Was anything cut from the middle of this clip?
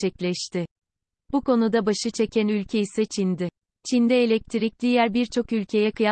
no; 0 cuts

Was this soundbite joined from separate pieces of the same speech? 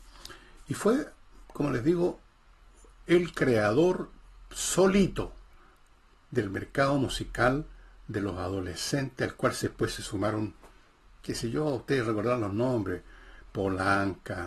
no; 0 cuts

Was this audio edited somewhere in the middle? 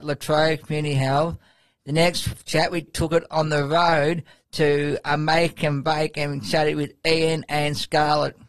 yes; 1 cut; at 2.9 s

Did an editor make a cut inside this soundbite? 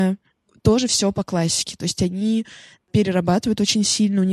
no; 0 cuts

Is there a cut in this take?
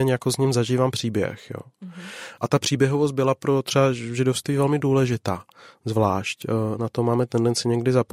no; 0 cuts

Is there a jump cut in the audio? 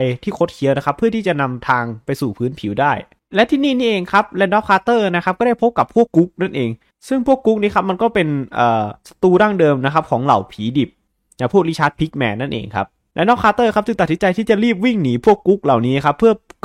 yes; 1 cut; at 6.1 s

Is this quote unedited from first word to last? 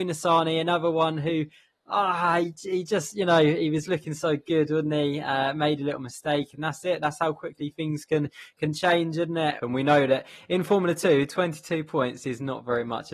no; 1 cut; at 9.6 s

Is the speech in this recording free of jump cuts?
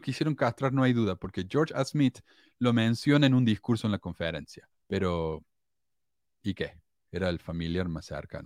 no; 1 cut; at 4.8 s

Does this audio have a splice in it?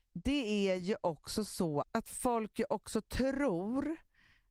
yes; 1 cut; at 1.8 s

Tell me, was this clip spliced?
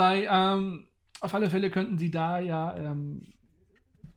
no; 0 cuts

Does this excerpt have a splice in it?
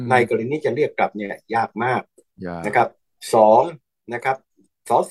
no; 0 cuts

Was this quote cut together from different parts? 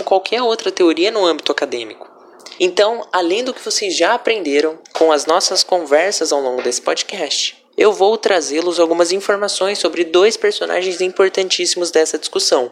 yes; 3 cuts; at 2.6 s, 4.8 s, 7.7 s

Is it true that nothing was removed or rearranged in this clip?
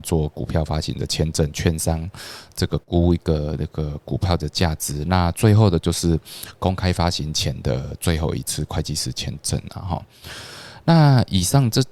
no; 1 cut; at 2.8 s

